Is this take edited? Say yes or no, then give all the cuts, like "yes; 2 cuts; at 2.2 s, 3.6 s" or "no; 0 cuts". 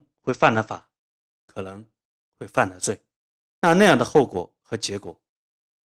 no; 0 cuts